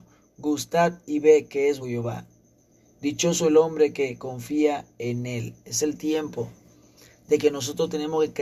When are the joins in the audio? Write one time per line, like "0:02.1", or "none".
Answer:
0:01.8